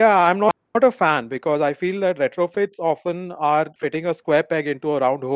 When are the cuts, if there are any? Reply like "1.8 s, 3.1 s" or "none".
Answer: 3.8 s

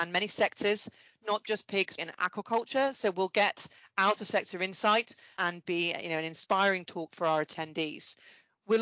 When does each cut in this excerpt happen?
2.0 s, 5.6 s

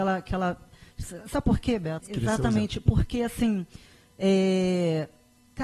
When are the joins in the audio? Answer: 2.0 s

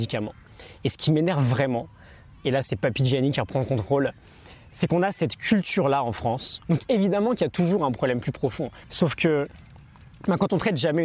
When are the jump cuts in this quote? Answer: 6.6 s, 8.8 s

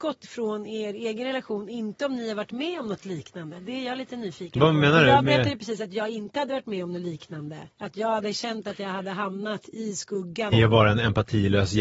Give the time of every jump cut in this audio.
7.7 s, 10.5 s

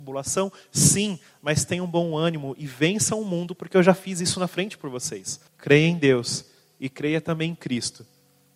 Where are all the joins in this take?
5.5 s

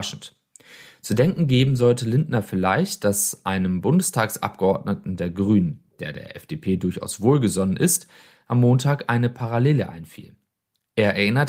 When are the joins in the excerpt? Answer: none

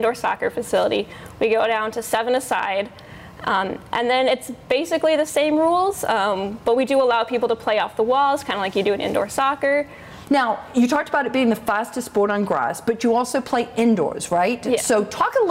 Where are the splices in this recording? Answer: 10.2 s

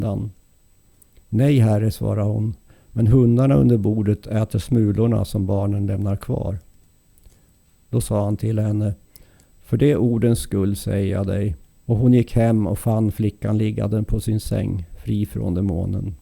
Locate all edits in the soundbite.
1.2 s, 11.7 s

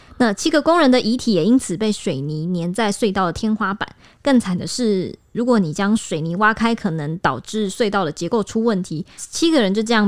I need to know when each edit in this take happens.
9.2 s

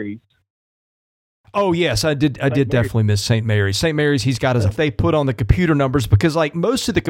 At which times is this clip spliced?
4.8 s

